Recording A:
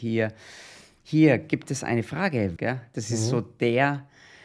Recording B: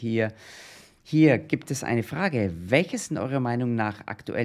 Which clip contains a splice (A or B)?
A